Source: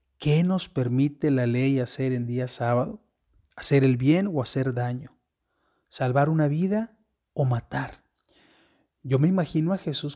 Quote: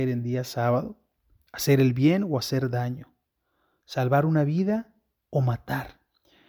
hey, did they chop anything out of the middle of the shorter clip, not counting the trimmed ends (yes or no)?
no